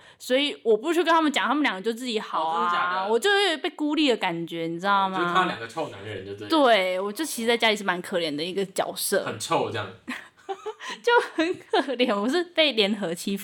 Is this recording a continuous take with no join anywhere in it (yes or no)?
yes